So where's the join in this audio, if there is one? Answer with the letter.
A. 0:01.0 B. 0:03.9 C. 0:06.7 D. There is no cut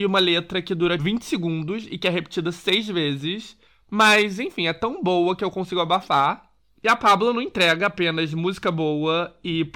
A